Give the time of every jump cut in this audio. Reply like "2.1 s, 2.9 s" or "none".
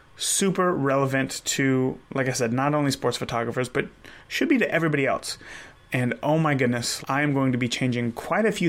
5.7 s, 7.0 s